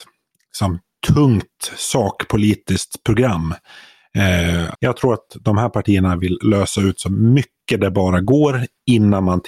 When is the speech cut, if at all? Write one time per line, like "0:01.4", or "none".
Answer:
0:04.7